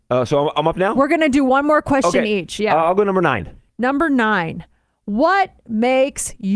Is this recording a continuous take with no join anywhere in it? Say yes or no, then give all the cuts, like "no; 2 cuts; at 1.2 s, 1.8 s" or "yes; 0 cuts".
yes; 0 cuts